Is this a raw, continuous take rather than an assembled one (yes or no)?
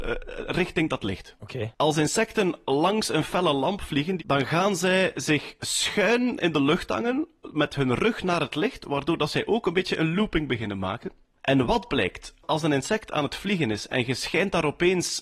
no